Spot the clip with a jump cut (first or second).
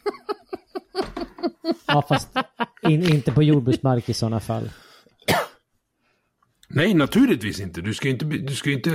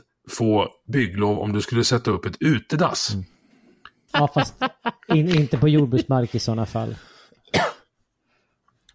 second